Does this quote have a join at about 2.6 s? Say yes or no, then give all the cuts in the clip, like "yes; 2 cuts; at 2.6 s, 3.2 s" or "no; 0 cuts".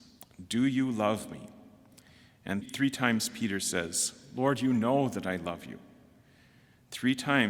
yes; 1 cut; at 2.6 s